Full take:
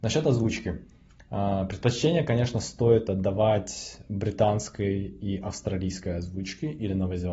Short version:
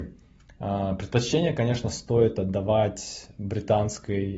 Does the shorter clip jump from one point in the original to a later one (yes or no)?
no